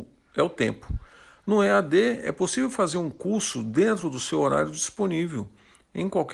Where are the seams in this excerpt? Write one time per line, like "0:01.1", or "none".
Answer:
none

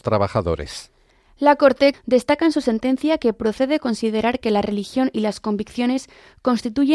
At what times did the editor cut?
0:01.9

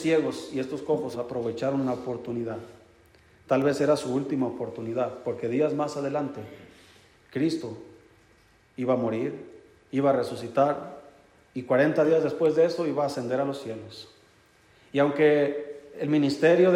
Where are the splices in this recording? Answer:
0:01.1

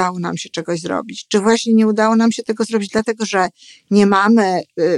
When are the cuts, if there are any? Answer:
none

